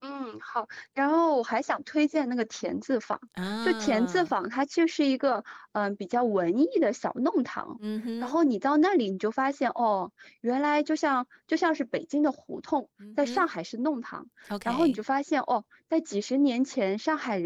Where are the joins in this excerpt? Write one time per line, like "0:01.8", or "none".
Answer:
none